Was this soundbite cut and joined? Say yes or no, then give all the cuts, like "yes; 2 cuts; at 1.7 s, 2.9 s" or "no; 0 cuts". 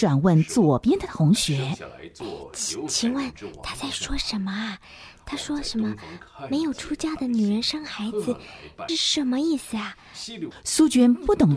yes; 2 cuts; at 8.9 s, 10.5 s